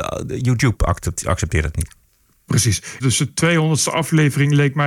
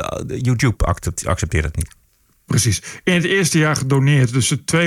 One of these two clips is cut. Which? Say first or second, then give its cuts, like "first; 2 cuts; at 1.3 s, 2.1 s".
first; 1 cut; at 3.0 s